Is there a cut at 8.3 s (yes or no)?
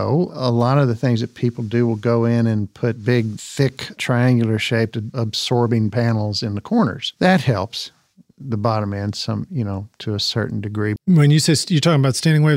no